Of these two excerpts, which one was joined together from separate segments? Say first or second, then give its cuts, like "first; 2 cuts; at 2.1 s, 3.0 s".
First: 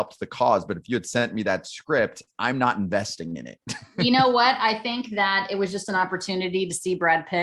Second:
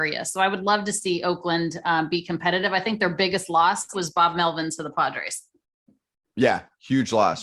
second; 1 cut; at 3.9 s